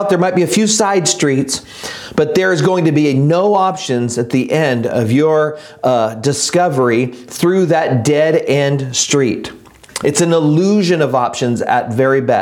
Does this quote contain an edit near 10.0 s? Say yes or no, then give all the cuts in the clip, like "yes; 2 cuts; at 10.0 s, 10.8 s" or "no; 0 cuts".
no; 0 cuts